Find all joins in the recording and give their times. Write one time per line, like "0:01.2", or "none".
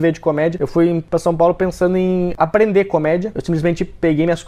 0:03.3